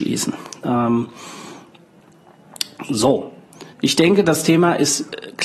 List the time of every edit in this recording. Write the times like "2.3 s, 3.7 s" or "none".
3.7 s